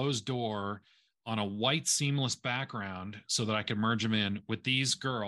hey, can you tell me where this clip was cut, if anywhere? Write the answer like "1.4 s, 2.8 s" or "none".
none